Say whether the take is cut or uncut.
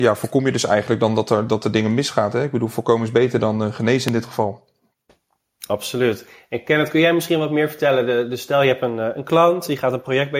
uncut